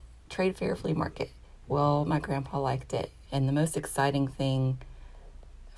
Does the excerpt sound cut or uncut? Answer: cut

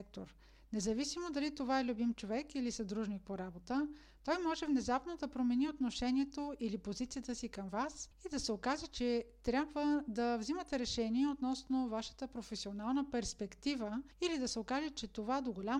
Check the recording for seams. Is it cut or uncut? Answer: uncut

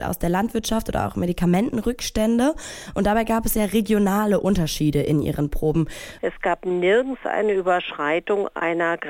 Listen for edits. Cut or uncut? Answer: cut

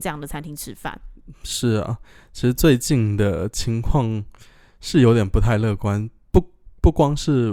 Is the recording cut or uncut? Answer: uncut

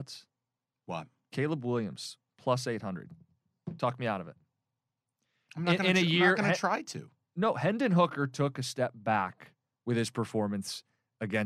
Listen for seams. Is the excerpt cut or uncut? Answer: uncut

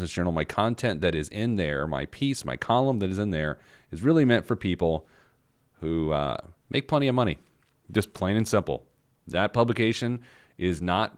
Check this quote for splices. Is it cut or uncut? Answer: uncut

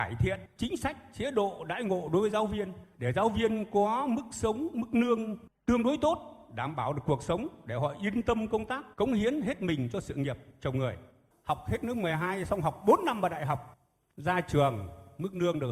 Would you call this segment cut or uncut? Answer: cut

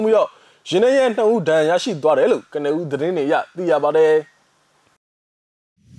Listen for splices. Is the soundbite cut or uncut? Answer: uncut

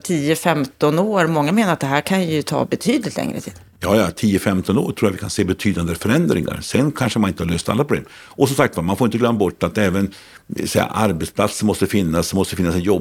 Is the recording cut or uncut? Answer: uncut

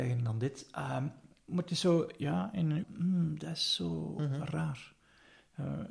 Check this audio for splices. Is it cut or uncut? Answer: cut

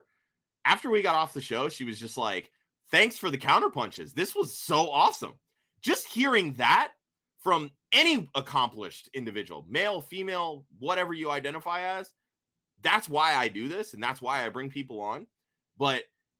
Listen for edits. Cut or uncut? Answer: uncut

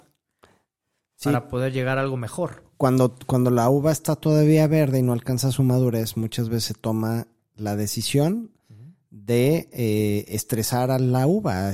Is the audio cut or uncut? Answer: uncut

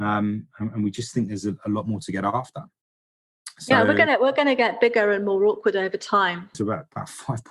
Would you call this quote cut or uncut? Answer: cut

